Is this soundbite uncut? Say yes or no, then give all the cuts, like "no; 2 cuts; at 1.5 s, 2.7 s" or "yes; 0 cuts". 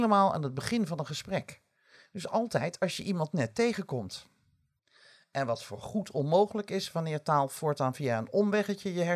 yes; 0 cuts